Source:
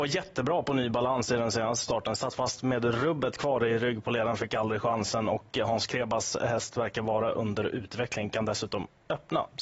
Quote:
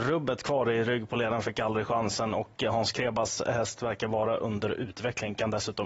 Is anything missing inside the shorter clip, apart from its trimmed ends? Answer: no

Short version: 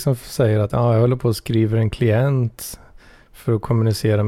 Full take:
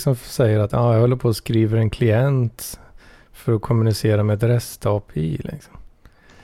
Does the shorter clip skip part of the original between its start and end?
no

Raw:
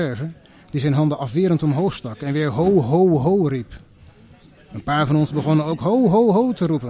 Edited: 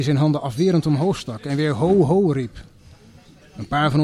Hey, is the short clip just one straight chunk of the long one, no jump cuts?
no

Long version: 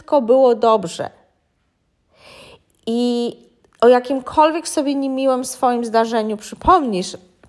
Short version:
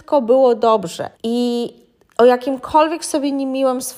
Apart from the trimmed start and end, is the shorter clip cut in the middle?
yes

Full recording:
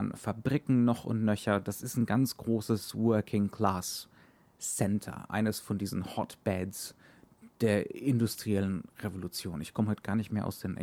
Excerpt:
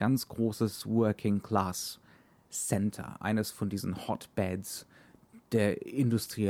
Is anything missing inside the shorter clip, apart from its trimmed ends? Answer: no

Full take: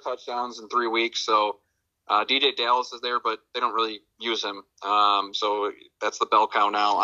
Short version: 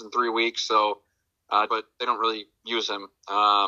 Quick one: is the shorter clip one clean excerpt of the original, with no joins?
no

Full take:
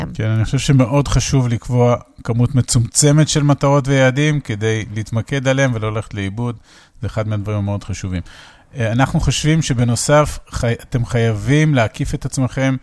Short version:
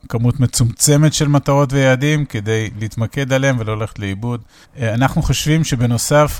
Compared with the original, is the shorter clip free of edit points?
no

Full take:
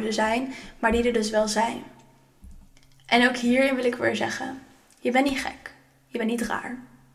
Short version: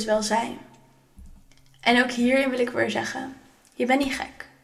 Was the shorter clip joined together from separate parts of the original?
no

